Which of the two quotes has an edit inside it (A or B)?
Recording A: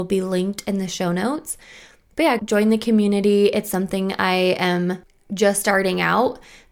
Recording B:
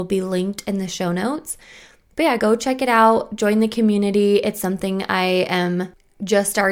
A